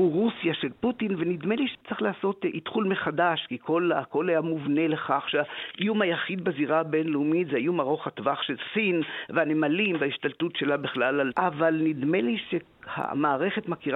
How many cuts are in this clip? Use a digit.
1